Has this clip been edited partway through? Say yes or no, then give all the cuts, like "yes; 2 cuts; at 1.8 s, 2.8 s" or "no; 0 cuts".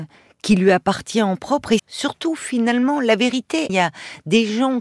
yes; 2 cuts; at 1.8 s, 3.7 s